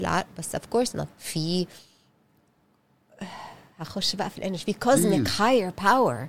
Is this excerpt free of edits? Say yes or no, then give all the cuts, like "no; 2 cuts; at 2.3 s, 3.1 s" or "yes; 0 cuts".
no; 1 cut; at 1.1 s